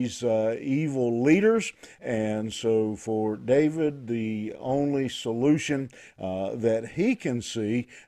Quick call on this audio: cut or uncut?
uncut